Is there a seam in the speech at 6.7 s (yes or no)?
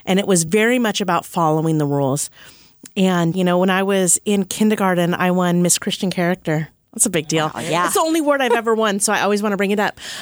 no